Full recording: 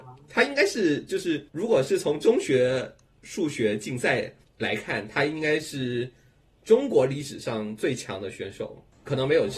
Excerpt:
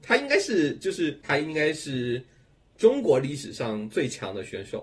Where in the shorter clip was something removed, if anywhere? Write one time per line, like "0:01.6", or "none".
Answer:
0:01.2